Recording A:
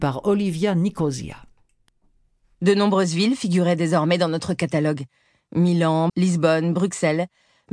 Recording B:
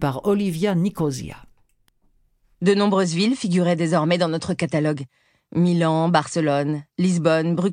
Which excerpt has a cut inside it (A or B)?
A